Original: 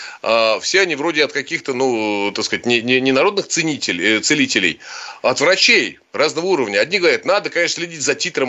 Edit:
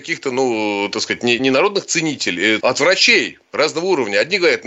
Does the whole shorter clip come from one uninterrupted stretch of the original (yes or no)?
no